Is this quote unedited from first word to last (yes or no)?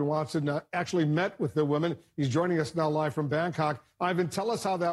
yes